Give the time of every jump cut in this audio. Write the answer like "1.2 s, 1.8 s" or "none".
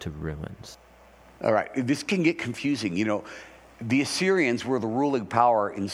none